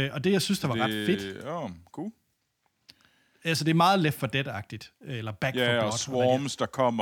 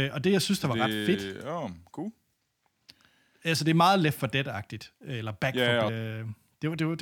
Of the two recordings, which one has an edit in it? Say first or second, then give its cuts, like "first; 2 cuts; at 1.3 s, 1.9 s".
second; 1 cut; at 5.9 s